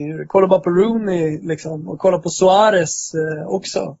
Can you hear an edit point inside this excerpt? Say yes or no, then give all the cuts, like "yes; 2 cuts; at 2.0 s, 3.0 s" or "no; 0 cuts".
no; 0 cuts